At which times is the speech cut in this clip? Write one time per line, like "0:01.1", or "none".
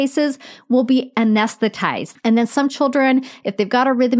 0:02.2